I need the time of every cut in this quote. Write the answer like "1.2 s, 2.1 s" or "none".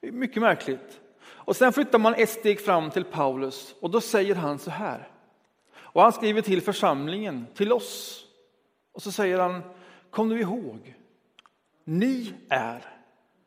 none